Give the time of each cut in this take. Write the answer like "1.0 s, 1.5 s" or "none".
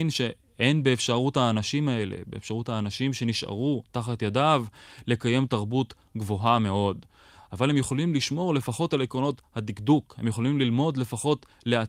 none